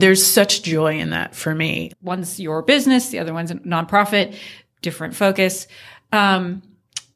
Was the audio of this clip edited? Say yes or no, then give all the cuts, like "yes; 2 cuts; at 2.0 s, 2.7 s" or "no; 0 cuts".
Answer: yes; 1 cut; at 1.9 s